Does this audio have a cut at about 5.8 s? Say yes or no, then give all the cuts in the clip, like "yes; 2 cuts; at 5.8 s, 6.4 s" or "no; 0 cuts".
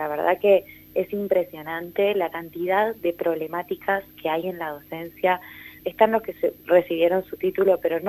yes; 1 cut; at 5.8 s